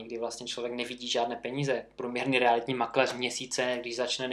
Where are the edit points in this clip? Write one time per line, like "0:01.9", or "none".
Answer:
none